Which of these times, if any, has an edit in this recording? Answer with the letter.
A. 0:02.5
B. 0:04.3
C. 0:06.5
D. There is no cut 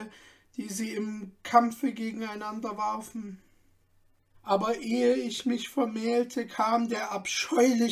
B